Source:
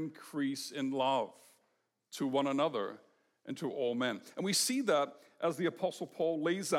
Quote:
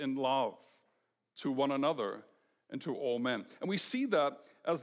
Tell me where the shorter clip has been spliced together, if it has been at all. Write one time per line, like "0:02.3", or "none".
none